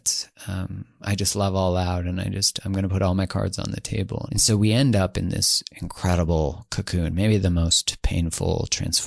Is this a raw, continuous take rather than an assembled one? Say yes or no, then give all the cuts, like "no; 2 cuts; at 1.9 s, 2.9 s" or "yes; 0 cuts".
no; 1 cut; at 4.3 s